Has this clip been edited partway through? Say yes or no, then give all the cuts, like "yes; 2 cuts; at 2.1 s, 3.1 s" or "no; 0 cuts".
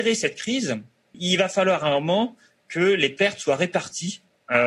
yes; 1 cut; at 1.1 s